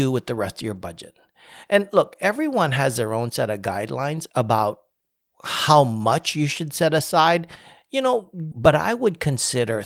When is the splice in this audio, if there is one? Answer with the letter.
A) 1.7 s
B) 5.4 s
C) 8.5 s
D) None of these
C